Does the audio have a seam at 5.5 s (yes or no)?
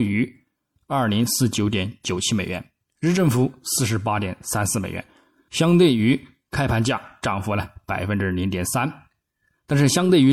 yes